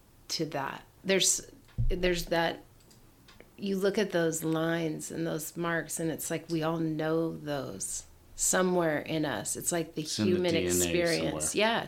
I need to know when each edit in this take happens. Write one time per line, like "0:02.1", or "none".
none